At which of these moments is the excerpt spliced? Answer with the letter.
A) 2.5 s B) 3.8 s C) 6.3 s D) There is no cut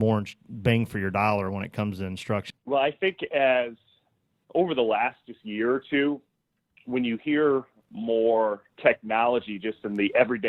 A